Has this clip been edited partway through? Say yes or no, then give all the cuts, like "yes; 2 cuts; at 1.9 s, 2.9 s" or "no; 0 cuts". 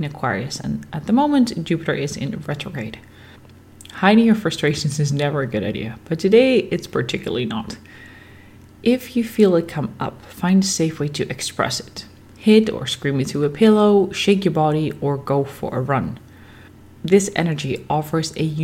no; 0 cuts